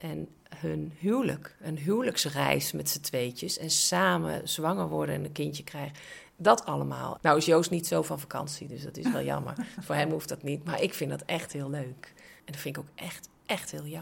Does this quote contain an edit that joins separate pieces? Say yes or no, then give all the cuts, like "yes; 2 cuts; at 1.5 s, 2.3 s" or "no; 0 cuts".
yes; 2 cuts; at 7.2 s, 12.4 s